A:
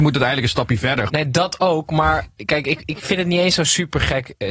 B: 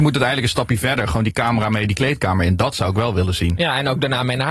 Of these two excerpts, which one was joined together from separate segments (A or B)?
A